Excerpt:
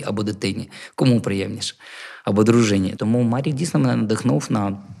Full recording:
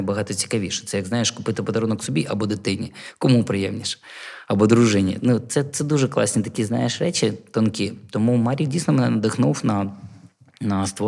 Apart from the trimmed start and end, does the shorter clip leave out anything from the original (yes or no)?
yes